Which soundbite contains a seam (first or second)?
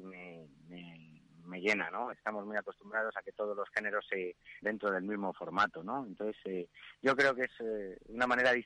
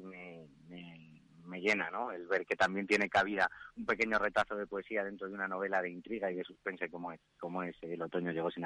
first